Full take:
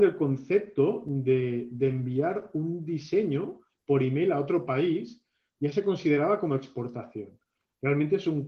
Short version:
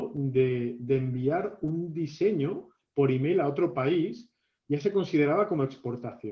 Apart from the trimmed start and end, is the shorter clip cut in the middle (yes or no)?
no